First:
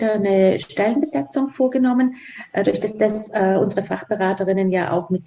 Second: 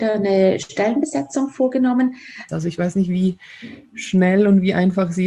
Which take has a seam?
second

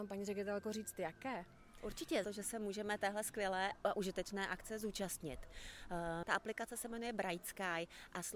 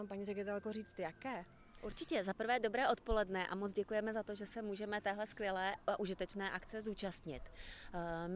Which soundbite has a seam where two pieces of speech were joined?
first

